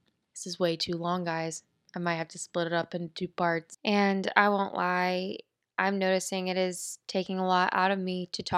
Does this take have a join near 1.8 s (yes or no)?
no